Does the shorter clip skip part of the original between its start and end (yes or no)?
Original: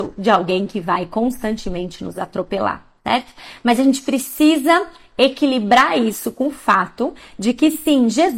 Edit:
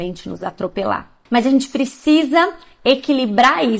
yes